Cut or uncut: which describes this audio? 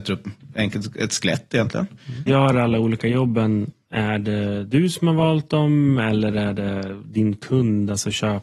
cut